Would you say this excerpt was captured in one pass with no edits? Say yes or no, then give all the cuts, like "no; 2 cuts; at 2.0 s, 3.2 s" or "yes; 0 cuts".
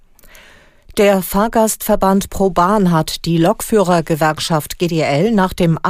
no; 1 cut; at 0.9 s